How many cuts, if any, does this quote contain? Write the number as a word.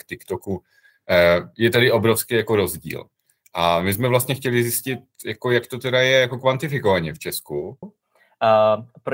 one